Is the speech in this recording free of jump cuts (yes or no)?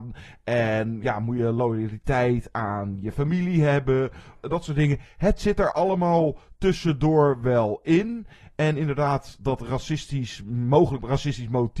no